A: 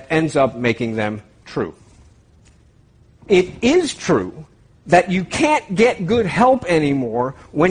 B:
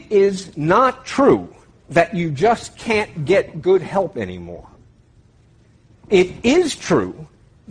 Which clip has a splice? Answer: A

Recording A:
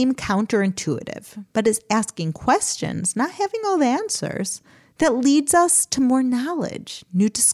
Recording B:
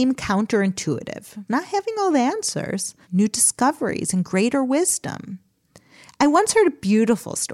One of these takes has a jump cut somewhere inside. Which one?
B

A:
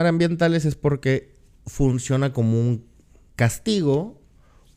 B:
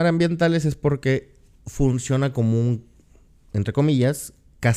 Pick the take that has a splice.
A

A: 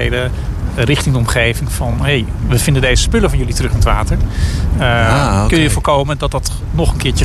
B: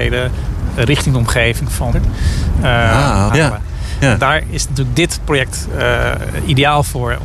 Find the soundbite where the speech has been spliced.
B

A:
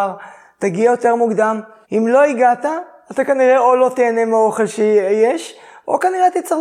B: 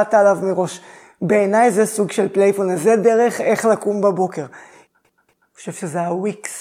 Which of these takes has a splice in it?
A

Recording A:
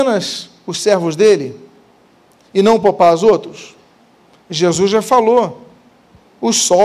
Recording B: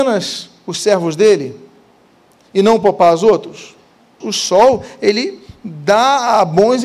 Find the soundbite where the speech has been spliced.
B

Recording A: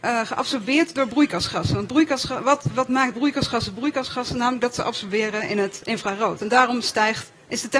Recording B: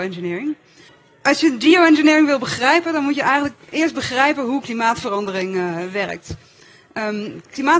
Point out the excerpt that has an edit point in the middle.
A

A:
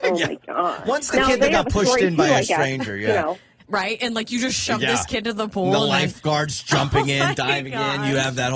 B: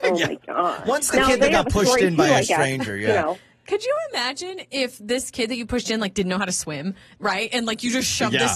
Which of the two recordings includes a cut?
A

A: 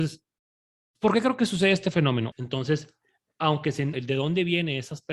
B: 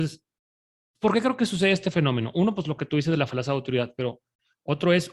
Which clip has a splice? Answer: A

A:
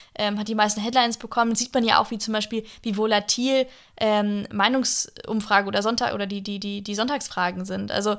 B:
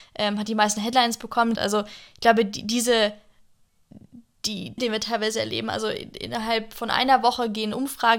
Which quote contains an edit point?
B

